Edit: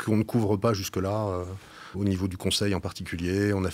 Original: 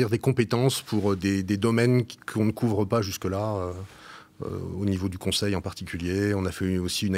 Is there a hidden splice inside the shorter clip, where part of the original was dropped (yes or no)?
yes